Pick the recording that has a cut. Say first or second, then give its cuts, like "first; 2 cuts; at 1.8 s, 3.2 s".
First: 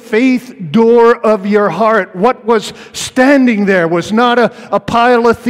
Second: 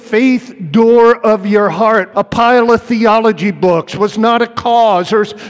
second; 1 cut; at 2.1 s